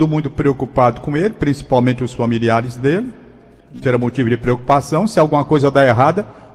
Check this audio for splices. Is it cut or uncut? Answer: cut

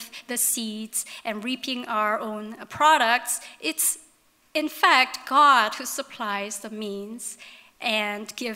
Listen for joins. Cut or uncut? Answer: uncut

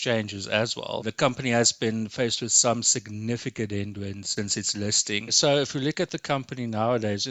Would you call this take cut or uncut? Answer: uncut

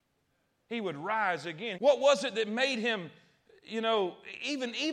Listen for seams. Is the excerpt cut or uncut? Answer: cut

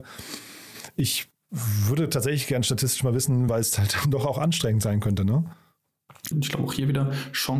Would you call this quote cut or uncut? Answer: cut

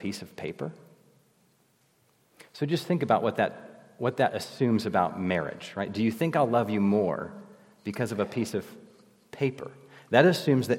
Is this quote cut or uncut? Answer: uncut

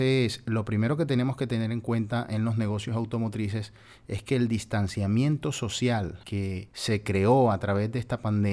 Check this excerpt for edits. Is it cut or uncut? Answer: uncut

